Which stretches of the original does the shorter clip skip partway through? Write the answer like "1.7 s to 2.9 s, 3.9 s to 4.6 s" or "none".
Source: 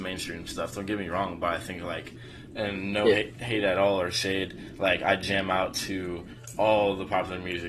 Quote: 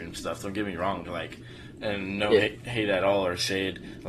1.4 s to 1.8 s